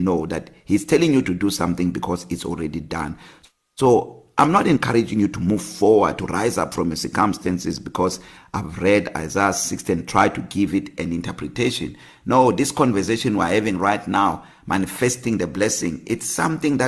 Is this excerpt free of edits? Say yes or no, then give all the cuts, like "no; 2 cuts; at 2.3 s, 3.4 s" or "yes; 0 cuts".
yes; 0 cuts